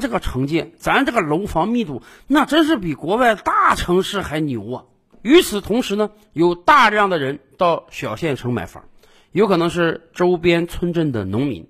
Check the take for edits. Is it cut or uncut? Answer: uncut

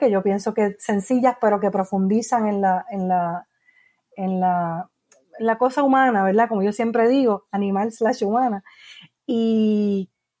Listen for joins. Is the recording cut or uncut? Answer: uncut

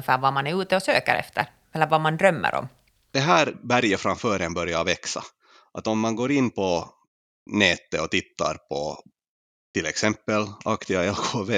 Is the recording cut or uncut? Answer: cut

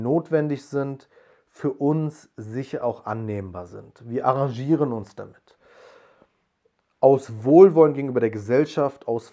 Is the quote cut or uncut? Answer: uncut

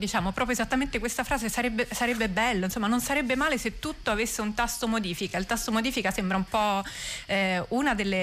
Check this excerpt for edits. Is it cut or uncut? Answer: uncut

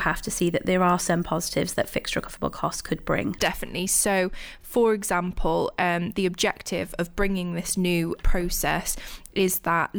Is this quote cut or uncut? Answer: uncut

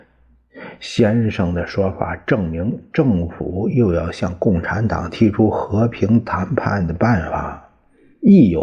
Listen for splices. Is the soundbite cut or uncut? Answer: uncut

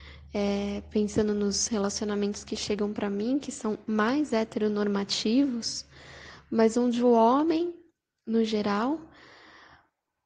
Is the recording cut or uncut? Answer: uncut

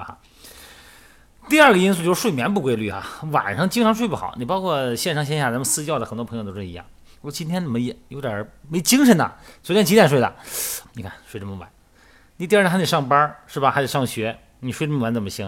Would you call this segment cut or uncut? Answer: cut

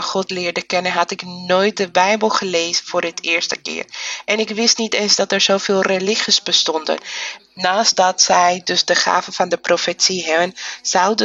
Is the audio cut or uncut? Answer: cut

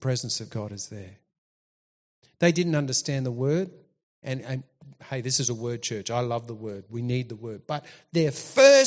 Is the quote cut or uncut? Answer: uncut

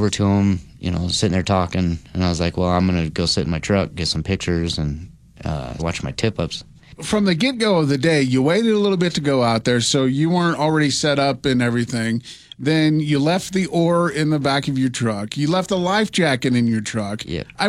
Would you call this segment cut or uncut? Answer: cut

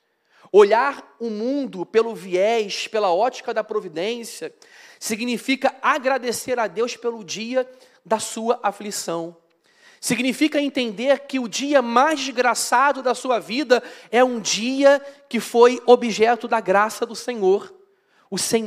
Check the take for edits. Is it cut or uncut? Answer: uncut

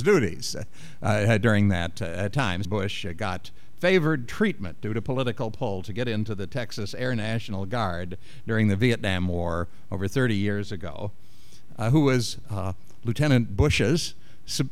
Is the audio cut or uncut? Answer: cut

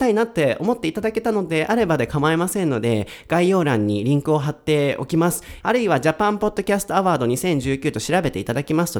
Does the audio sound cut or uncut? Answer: cut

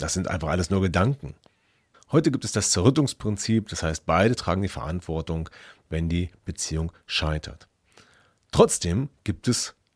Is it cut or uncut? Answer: cut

